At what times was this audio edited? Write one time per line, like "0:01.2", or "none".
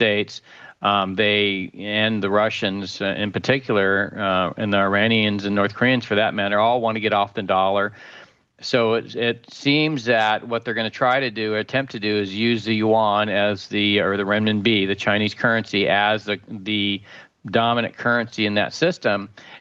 none